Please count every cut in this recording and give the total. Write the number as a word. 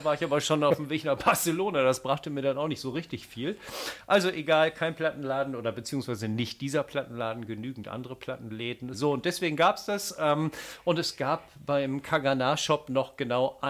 one